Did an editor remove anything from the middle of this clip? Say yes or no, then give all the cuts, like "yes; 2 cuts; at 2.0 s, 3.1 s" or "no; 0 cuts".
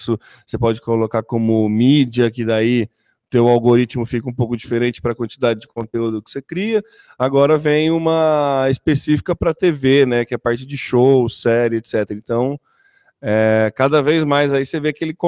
no; 0 cuts